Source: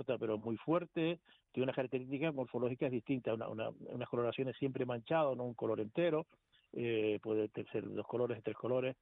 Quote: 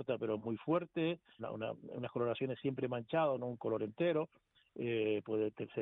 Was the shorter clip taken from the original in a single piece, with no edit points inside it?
no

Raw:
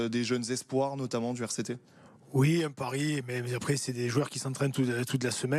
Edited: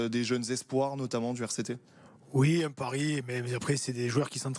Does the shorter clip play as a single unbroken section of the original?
yes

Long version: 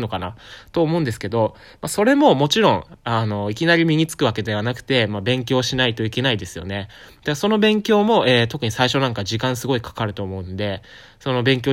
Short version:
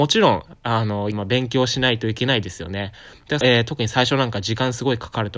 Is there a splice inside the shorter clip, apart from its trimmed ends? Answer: yes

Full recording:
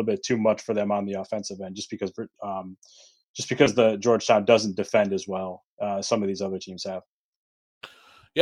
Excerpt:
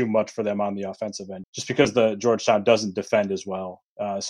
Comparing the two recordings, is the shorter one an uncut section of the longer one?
no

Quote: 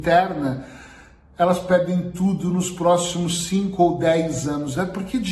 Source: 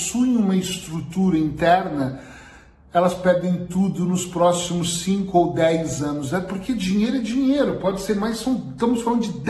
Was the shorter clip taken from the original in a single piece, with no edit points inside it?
yes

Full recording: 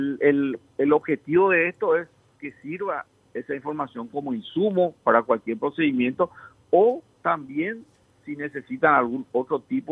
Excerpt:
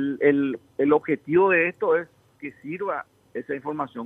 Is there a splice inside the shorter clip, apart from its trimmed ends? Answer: no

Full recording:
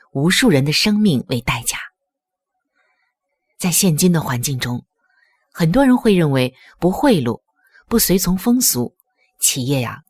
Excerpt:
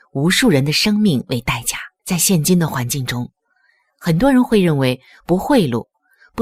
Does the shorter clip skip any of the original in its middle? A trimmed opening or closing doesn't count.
yes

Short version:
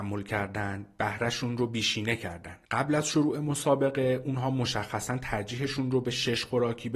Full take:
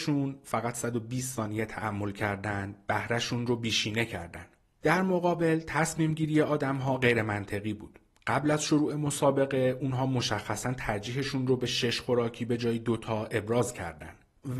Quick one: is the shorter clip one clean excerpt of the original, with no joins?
no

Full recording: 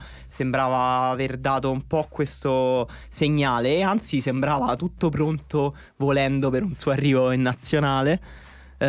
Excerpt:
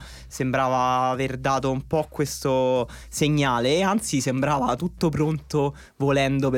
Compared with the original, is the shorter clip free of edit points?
yes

